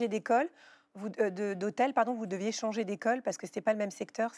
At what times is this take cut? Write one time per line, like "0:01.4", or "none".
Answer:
none